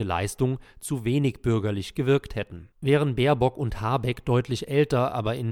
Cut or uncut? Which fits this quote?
cut